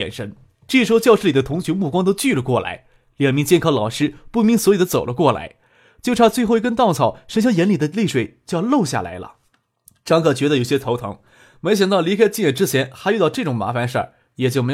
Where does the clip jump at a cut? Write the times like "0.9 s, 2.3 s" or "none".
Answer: none

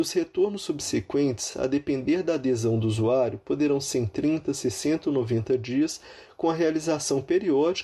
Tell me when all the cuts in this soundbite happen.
none

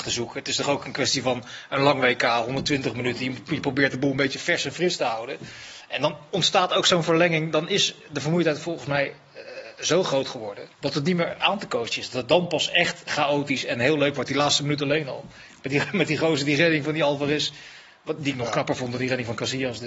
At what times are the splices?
10.7 s

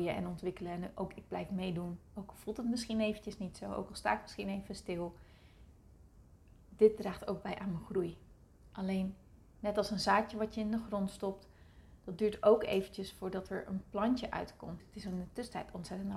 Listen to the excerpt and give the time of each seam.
14.8 s

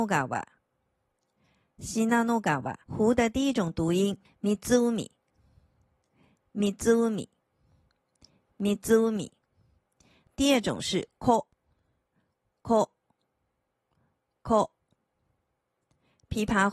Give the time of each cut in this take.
2.8 s

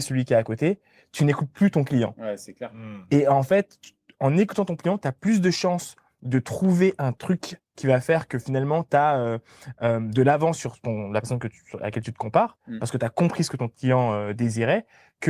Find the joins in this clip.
none

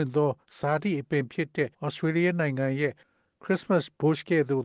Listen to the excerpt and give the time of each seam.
1.7 s

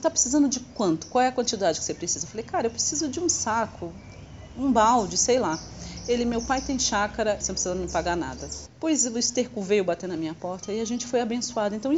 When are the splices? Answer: 7.4 s, 8.7 s

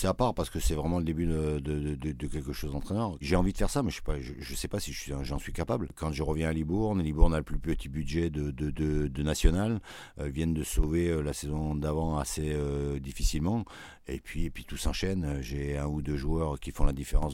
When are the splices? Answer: 3.2 s

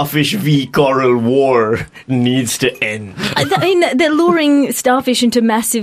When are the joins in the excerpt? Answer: none

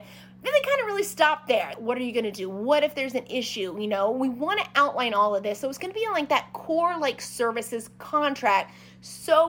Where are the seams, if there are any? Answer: 1.7 s

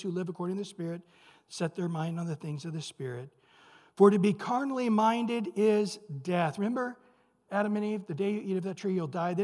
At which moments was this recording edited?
none

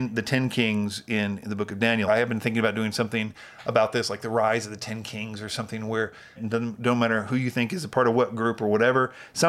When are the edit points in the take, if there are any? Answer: 2.1 s, 6.4 s

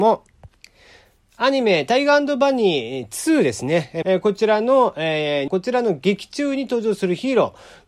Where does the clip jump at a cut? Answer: 4.0 s, 5.5 s

